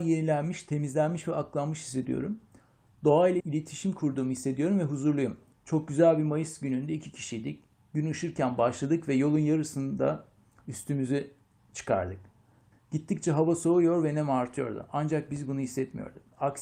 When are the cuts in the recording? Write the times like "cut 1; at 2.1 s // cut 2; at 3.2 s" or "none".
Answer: cut 1; at 3.4 s // cut 2; at 5.5 s // cut 3; at 12.7 s

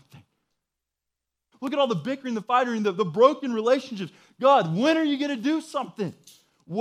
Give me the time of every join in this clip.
cut 1; at 1.5 s

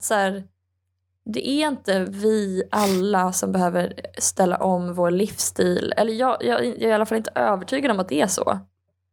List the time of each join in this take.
none

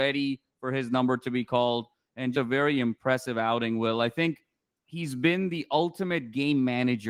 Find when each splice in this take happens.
cut 1; at 2.3 s

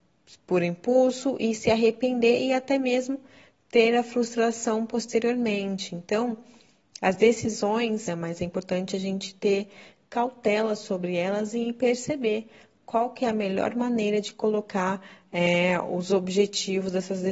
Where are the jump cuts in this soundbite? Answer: cut 1; at 8.1 s

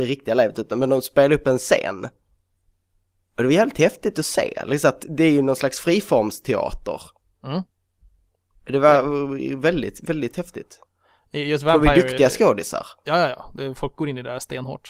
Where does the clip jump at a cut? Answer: none

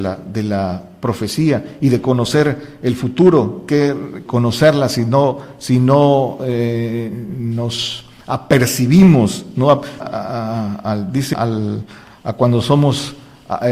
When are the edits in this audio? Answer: cut 1; at 4.3 s // cut 2; at 10.0 s // cut 3; at 11.3 s

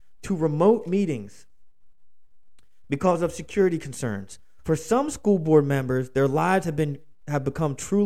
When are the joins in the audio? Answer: cut 1; at 4.6 s

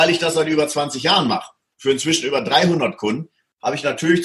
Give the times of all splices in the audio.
none

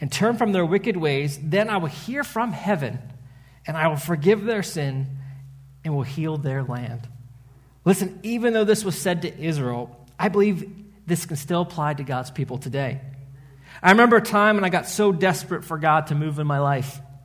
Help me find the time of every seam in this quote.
none

